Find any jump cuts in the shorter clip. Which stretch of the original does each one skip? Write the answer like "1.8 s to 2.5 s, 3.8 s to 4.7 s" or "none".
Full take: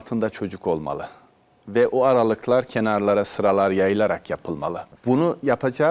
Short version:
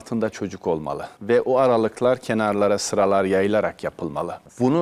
1.1 s to 1.6 s